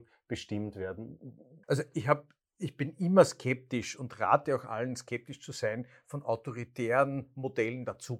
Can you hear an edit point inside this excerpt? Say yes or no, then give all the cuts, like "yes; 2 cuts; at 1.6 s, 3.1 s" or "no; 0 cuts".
yes; 1 cut; at 1.6 s